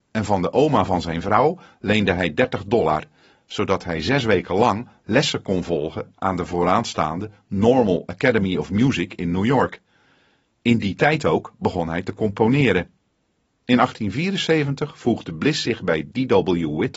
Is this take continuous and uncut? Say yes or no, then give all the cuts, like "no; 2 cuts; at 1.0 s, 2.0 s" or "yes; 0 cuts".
yes; 0 cuts